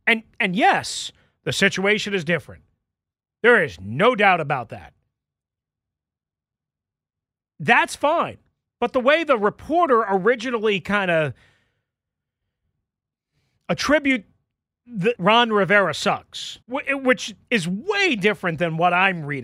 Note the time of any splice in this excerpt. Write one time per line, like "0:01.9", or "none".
0:15.2
0:16.6